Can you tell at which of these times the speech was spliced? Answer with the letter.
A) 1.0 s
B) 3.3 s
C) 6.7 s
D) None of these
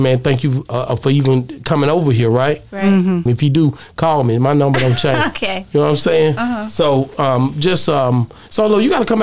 B